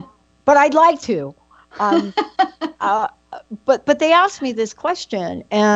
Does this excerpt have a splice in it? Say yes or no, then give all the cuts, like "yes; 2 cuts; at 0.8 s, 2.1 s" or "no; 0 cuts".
no; 0 cuts